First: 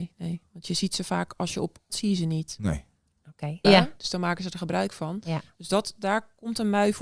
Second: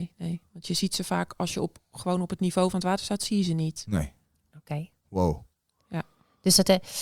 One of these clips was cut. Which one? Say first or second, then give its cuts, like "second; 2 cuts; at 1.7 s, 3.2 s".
first; 2 cuts; at 1.9 s, 3.6 s